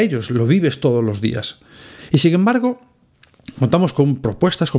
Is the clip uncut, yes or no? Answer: yes